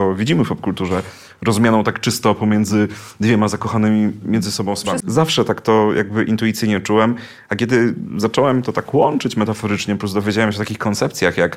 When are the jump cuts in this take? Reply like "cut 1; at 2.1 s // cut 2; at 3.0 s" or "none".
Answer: cut 1; at 5.0 s